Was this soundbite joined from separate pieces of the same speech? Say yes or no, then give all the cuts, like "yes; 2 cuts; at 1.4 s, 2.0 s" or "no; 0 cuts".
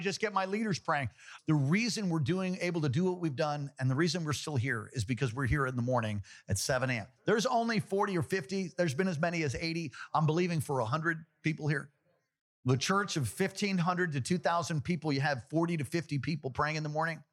yes; 1 cut; at 1.4 s